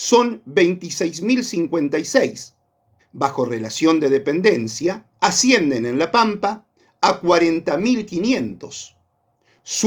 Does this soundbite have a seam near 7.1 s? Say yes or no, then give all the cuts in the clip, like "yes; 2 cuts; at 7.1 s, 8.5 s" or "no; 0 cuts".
no; 2 cuts; at 3.0 s, 5.1 s